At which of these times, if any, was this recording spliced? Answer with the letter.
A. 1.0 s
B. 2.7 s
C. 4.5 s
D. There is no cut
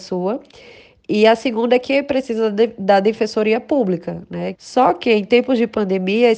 C